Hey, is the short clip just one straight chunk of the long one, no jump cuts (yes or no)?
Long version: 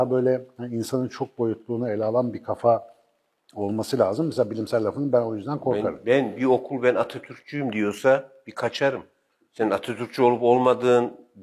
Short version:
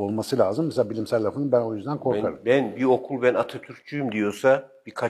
yes